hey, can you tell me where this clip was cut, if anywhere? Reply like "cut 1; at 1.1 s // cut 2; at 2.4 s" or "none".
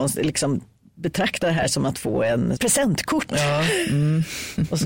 cut 1; at 2.6 s